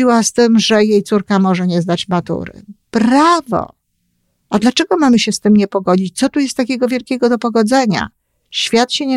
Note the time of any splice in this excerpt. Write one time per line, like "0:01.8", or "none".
none